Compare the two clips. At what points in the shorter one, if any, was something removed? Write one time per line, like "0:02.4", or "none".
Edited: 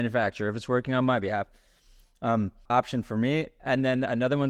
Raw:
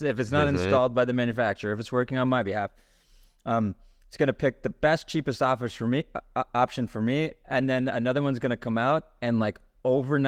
0:02.7